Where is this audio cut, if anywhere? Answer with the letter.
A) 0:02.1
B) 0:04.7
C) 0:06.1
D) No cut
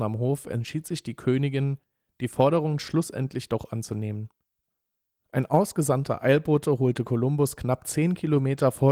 D